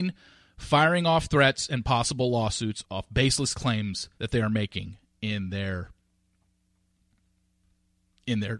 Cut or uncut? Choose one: cut